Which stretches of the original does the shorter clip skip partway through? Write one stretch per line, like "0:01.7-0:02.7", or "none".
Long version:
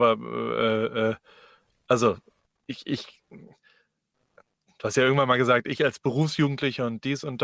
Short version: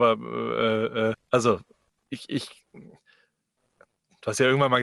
0:01.1-0:01.7